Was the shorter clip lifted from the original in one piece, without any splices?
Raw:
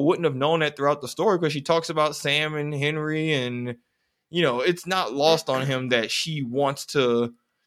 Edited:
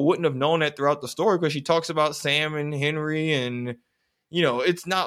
yes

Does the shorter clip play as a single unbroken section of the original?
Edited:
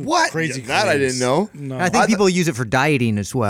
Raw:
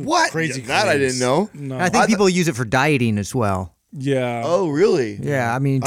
yes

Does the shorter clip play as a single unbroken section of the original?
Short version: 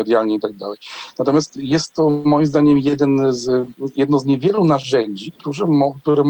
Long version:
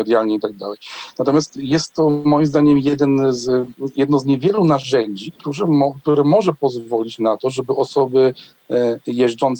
yes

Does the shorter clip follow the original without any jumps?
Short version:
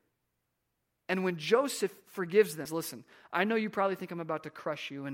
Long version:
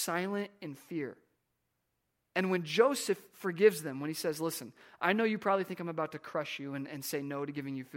no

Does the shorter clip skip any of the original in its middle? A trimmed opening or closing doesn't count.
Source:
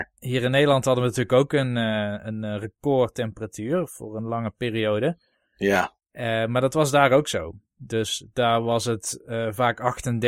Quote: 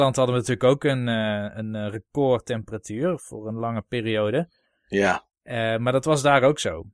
no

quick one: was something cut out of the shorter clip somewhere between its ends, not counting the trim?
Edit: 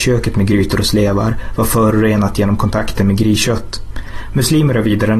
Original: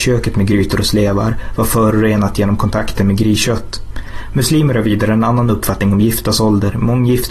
no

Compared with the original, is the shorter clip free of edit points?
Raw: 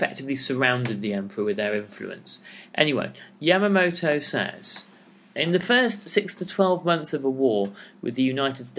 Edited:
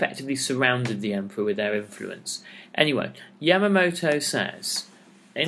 yes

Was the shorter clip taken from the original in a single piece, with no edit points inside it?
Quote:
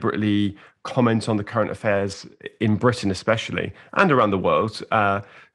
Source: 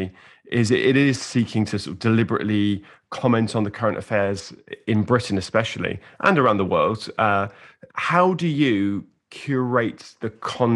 yes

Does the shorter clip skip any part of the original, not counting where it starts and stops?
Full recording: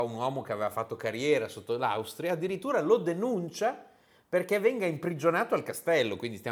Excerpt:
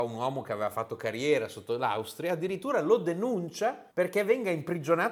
yes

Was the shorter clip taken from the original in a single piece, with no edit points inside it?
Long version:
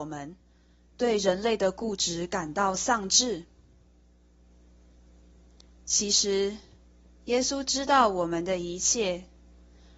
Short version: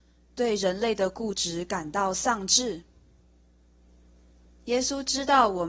no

